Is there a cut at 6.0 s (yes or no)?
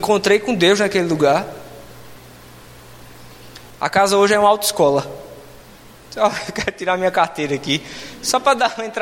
no